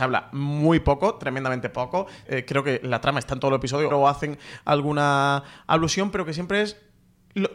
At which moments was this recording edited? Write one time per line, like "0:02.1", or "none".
0:02.3
0:03.9